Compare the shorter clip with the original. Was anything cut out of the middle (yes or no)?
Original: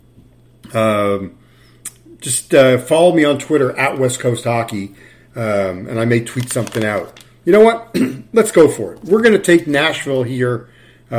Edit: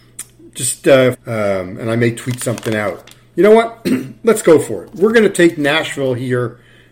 yes